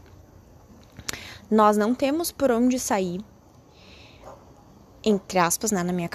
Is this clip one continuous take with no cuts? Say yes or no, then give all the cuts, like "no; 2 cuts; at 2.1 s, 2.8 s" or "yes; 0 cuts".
yes; 0 cuts